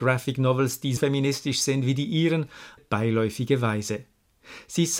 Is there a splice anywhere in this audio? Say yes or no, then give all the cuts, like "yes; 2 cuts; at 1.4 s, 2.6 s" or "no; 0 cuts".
yes; 2 cuts; at 1.0 s, 2.8 s